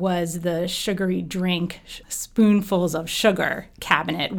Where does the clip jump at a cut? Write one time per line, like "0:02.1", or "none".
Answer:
0:02.0